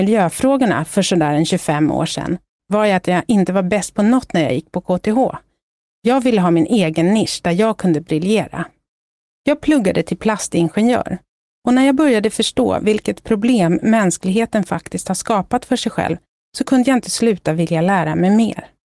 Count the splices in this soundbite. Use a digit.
0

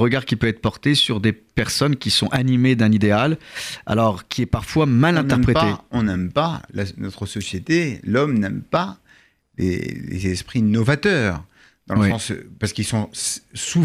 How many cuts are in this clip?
0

